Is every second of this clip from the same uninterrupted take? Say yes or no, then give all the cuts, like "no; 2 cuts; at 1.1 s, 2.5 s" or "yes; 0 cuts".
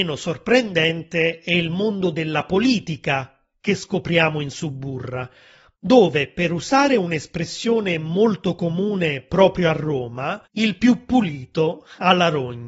no; 1 cut; at 10.4 s